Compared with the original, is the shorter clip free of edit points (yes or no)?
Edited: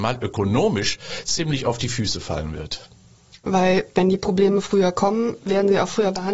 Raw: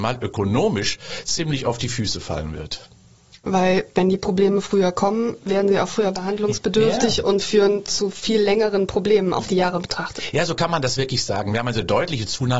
yes